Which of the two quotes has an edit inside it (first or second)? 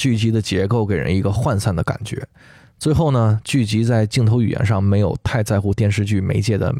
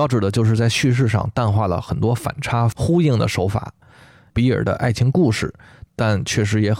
second